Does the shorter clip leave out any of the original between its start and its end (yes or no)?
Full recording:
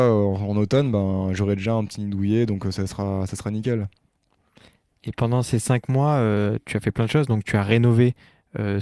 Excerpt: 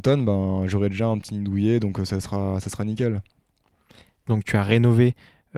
yes